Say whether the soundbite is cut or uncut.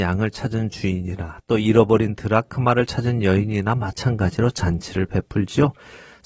uncut